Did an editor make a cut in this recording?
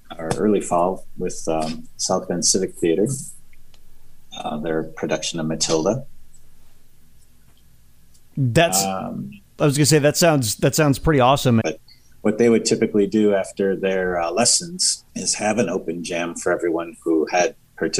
yes; 2 cuts; at 11.6 s, 15.1 s

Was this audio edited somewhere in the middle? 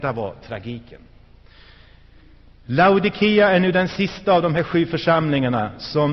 no; 0 cuts

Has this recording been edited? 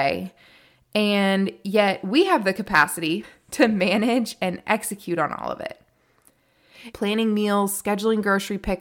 yes; 2 cuts; at 3.2 s, 6.9 s

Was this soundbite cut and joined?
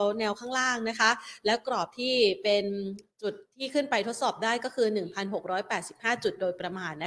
yes; 1 cut; at 3.1 s

